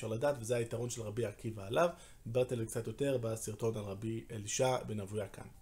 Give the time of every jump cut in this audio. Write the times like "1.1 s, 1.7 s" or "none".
none